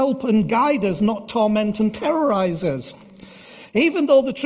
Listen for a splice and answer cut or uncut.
uncut